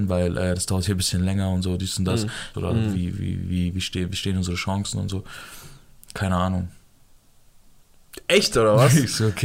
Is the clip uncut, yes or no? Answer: no